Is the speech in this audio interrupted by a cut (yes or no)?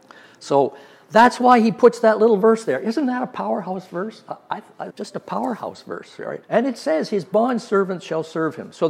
yes